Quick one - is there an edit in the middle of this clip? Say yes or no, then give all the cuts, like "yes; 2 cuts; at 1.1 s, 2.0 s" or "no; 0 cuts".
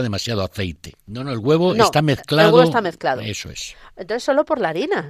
yes; 1 cut; at 0.9 s